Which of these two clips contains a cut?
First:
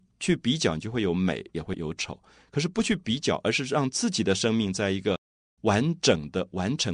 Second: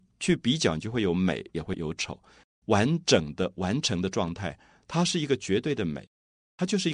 second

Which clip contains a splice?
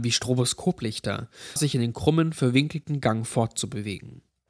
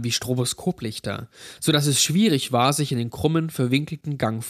first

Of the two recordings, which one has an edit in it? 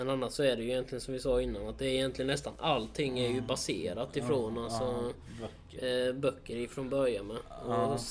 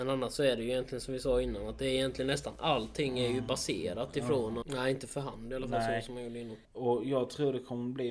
second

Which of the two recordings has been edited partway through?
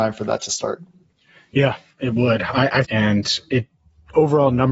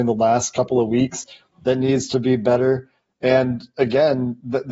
first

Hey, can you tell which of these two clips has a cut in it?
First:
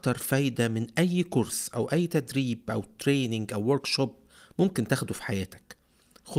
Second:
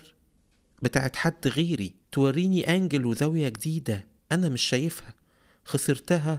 second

